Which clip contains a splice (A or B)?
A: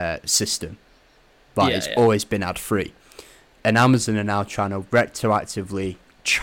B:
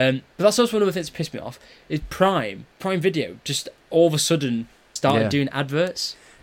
B